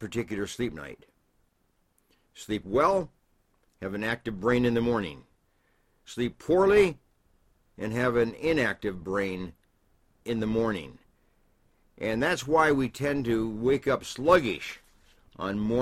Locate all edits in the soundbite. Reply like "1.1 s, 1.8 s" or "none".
none